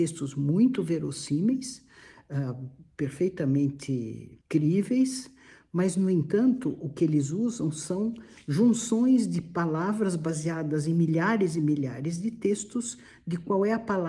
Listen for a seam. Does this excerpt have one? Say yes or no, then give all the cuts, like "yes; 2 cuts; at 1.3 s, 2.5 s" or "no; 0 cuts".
yes; 1 cut; at 4.4 s